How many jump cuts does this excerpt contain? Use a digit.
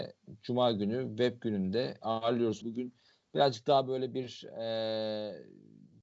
1